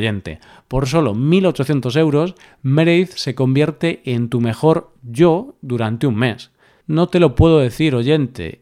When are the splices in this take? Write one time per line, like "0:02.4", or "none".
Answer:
0:06.8